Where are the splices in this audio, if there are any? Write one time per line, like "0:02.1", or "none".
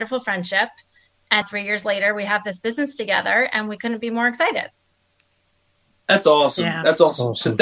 0:01.4